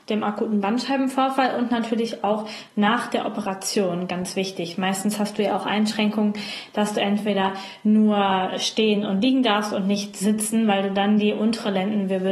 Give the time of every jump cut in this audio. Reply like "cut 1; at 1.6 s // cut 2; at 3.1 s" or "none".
none